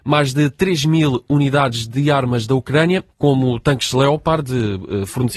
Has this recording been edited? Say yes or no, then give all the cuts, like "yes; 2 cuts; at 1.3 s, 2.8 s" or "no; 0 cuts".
yes; 1 cut; at 3.1 s